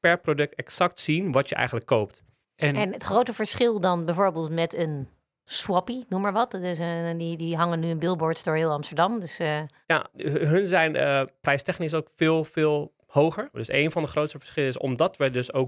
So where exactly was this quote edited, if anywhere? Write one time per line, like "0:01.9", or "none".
0:02.4
0:10.1
0:13.5